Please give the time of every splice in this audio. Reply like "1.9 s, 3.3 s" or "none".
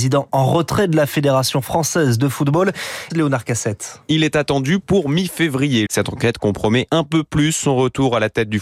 3.1 s, 5.9 s